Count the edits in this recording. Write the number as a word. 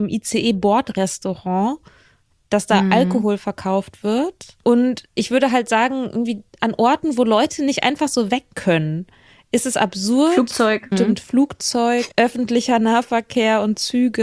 two